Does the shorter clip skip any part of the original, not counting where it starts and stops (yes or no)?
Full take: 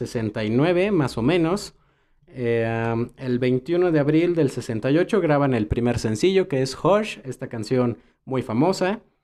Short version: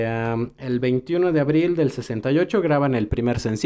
no